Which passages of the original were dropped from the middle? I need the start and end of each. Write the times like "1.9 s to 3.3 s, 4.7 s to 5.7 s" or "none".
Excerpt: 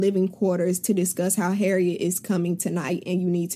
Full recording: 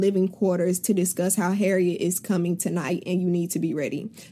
none